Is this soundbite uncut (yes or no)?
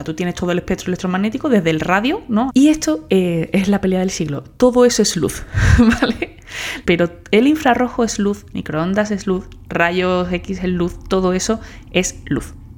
no